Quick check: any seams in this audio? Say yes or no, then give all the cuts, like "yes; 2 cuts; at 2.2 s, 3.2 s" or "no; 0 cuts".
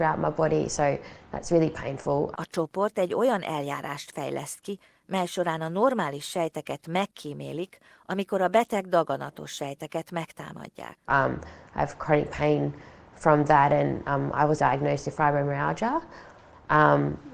yes; 3 cuts; at 2.3 s, 11.1 s, 14.6 s